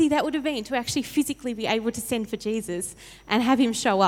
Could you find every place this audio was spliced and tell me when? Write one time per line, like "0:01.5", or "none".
none